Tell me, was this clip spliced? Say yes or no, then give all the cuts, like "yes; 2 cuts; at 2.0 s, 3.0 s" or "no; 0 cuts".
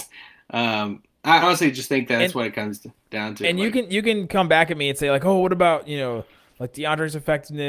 yes; 1 cut; at 1.4 s